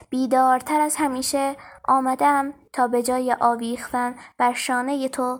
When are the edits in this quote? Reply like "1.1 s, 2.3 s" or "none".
none